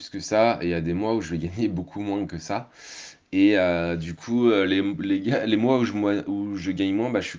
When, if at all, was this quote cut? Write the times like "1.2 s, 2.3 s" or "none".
none